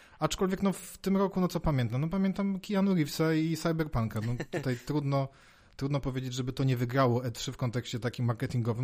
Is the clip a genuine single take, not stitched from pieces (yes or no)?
yes